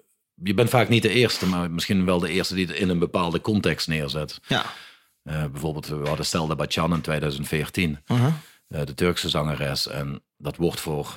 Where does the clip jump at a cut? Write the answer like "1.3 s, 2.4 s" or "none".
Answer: none